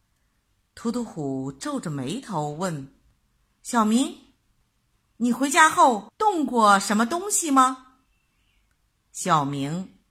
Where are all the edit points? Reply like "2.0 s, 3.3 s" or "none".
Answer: none

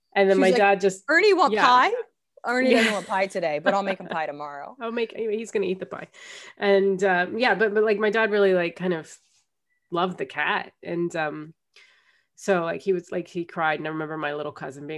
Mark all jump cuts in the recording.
none

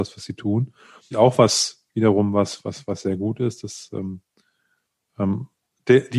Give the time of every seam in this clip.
1.1 s

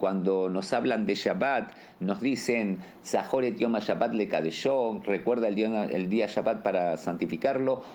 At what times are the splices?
none

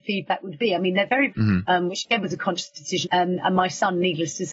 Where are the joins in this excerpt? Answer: 1.3 s, 3.0 s

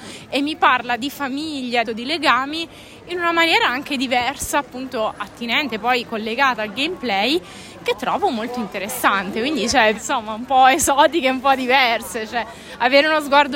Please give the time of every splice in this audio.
1.8 s, 9.9 s

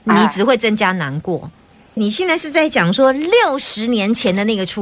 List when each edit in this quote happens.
2.0 s

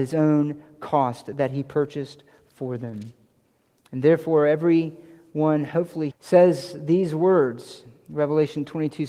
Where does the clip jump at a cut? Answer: 6.1 s

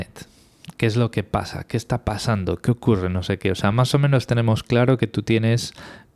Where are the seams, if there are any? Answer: none

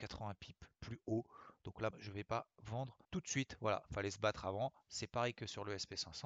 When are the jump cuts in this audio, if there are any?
1.9 s, 3.0 s

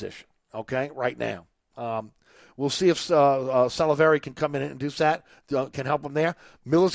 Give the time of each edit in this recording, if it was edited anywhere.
none

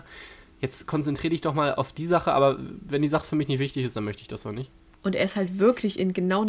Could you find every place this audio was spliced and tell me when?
4.9 s

